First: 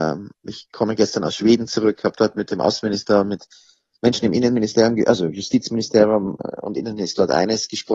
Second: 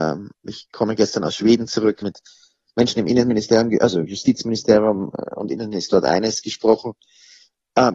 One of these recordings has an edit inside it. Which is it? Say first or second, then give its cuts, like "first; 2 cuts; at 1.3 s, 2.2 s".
second; 1 cut; at 2.0 s